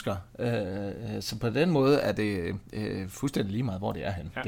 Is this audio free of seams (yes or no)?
no